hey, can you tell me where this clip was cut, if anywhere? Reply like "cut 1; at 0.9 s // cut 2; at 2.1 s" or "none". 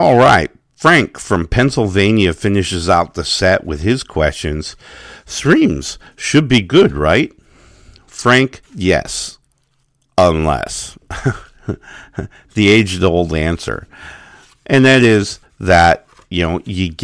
cut 1; at 8.7 s